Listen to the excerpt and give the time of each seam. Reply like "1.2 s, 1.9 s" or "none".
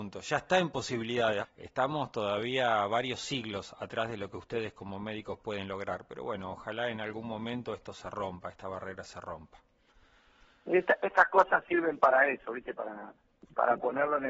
1.4 s